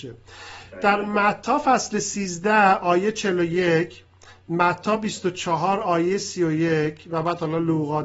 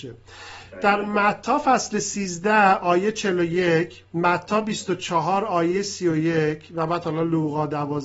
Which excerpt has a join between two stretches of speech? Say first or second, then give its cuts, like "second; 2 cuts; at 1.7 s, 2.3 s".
second; 1 cut; at 4.1 s